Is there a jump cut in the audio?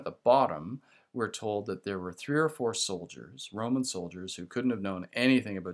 no; 0 cuts

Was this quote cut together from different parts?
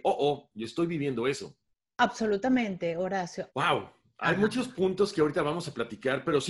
yes; 1 cut; at 3.5 s

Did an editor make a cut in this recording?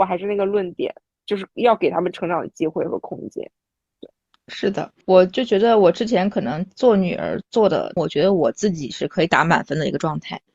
yes; 2 cuts; at 5.0 s, 8.0 s

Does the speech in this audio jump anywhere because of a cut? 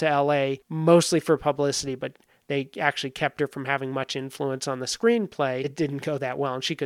no; 0 cuts

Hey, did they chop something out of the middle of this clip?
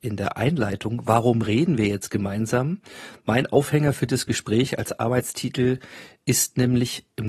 no; 0 cuts

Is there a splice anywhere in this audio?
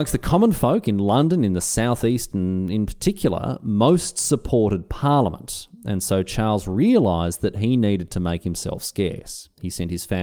no; 0 cuts

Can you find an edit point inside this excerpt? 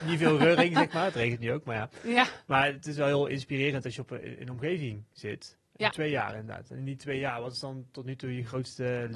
yes; 1 cut; at 5.9 s

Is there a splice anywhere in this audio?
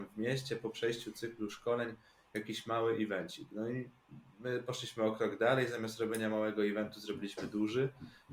no; 0 cuts

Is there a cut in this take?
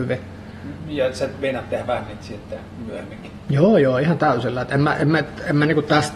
no; 0 cuts

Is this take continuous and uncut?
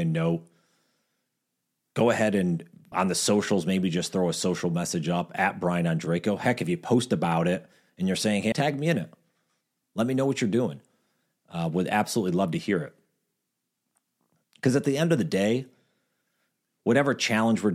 no; 2 cuts; at 2.9 s, 8.5 s

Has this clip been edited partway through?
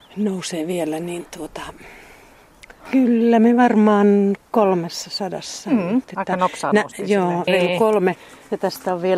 yes; 3 cuts; at 2.8 s, 6.0 s, 7.5 s

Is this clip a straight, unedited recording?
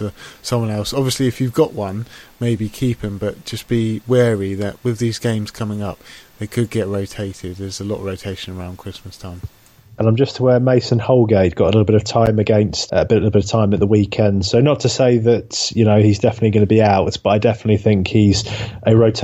no; 1 cut; at 12.9 s

